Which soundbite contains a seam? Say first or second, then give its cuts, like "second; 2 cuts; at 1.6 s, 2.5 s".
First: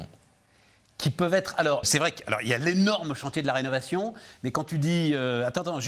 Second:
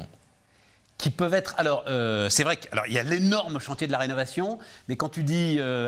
first; 1 cut; at 1.8 s